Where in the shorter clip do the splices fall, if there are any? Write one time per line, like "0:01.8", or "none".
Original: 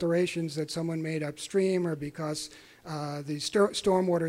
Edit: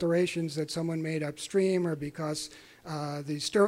none